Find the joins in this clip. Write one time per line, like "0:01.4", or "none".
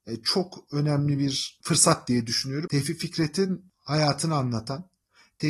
0:02.7